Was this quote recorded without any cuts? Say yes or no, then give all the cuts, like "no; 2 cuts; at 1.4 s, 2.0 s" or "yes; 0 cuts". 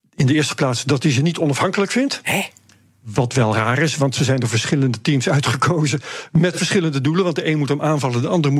yes; 0 cuts